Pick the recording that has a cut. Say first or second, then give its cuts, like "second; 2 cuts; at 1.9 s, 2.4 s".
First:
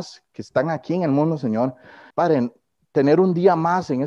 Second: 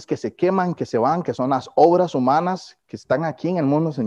first; 1 cut; at 2.1 s